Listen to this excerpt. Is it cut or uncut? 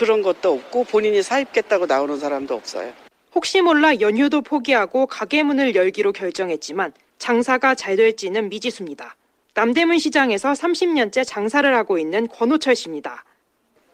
uncut